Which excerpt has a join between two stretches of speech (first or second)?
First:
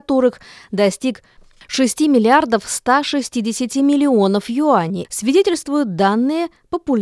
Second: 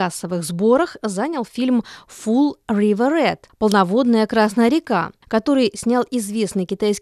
first